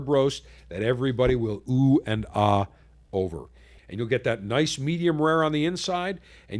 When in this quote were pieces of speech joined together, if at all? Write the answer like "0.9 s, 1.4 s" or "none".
3.8 s